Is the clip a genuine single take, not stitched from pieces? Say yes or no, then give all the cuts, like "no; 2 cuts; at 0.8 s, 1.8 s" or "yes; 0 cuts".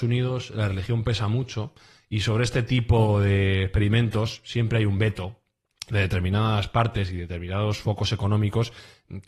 yes; 0 cuts